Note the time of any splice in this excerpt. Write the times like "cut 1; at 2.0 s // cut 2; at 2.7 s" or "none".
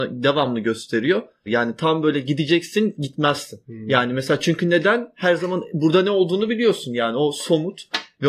cut 1; at 1.5 s